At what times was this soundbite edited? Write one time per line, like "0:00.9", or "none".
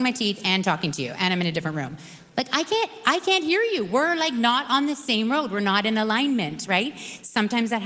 none